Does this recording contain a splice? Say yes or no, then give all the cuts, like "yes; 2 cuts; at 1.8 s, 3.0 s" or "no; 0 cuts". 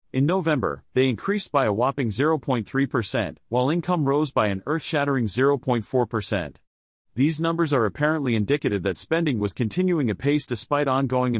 no; 0 cuts